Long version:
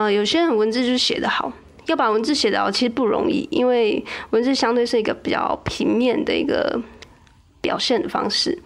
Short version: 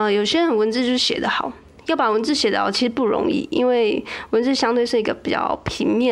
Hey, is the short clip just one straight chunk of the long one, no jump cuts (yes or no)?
yes